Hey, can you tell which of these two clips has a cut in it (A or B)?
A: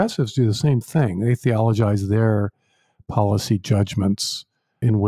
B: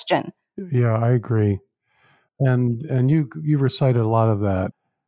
B